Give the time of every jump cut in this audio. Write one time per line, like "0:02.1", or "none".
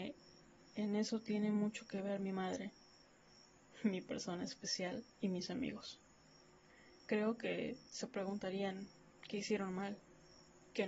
0:05.1